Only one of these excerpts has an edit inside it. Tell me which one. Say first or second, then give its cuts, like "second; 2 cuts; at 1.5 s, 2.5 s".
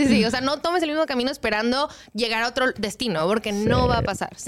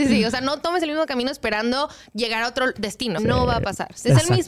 second; 1 cut; at 3.2 s